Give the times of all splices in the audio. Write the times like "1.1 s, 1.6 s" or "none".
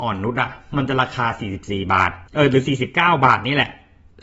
2.3 s